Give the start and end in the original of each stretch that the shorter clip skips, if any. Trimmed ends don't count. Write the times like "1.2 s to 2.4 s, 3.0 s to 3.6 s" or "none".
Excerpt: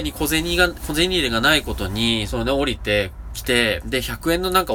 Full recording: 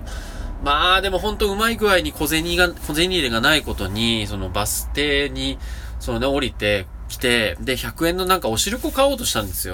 4.3 s to 6.0 s